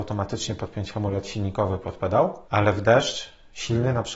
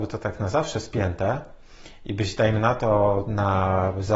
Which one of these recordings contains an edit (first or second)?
first